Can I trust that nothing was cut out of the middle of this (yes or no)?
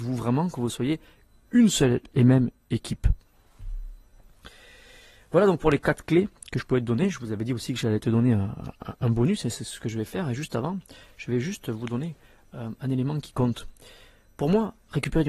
yes